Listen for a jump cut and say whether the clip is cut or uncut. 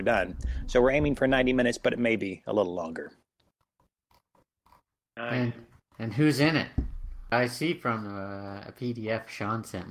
cut